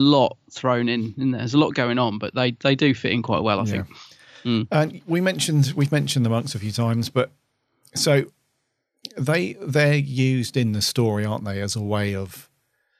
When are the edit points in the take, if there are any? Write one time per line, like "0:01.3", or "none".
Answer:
none

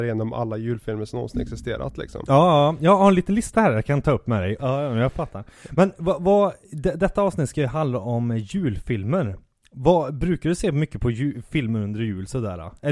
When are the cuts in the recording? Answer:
0:04.6

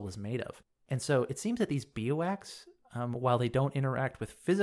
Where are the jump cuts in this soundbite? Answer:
none

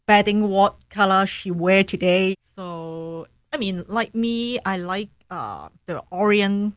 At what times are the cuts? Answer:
0:02.3

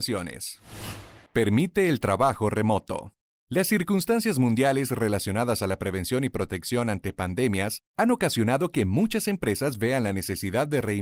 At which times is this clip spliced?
0:01.3

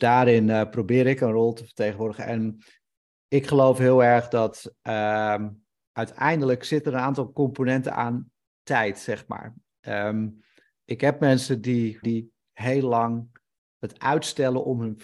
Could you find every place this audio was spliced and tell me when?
0:12.0

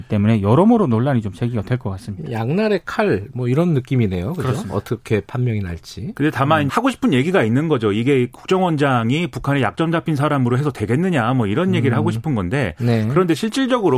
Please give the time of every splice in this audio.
0:06.7

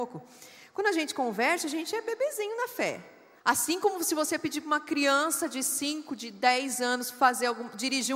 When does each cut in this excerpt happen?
0:03.4

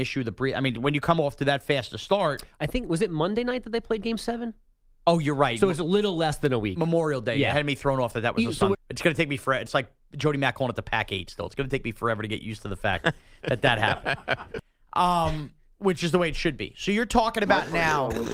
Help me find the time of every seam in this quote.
0:08.7

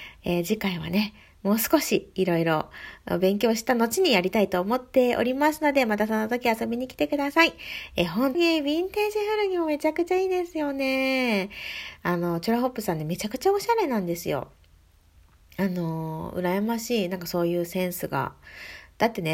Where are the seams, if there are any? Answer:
0:08.3

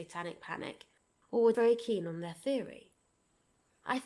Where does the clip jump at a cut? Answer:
0:01.5

